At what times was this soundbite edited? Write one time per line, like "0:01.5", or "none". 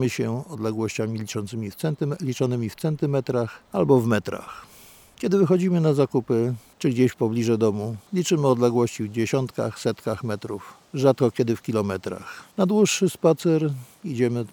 none